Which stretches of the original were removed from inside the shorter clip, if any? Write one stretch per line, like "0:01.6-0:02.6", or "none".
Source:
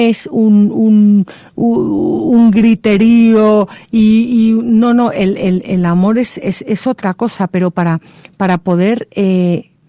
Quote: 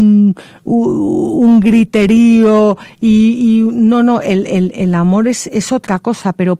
0:06.4-0:06.6